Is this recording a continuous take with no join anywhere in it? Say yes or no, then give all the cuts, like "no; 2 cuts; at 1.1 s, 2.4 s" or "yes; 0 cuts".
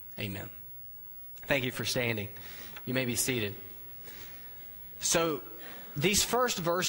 yes; 0 cuts